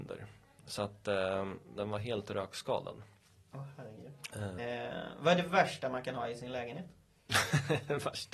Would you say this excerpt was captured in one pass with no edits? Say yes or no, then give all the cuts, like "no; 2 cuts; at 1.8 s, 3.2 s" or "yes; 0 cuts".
no; 2 cuts; at 1.8 s, 4.6 s